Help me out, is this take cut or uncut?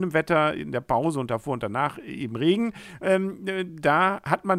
uncut